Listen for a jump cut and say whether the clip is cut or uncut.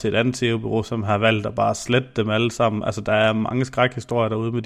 uncut